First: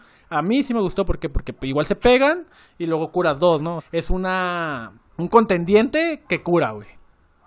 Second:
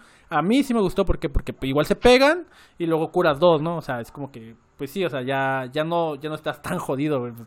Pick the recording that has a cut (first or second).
first